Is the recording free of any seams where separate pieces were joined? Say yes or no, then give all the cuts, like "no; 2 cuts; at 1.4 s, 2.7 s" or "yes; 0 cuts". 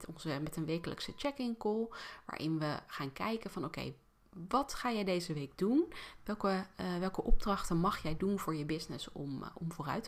yes; 0 cuts